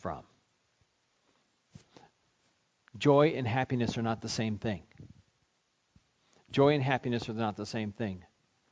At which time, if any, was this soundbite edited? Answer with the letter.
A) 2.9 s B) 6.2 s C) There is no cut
C